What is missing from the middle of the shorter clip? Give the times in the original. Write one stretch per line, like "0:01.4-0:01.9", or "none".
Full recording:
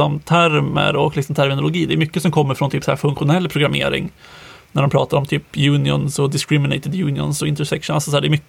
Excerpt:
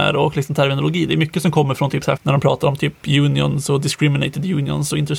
0:03.0-0:04.7